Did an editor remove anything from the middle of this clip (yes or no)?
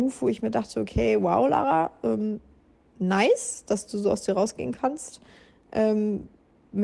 no